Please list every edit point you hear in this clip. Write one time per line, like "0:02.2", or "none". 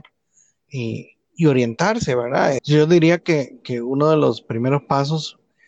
0:02.6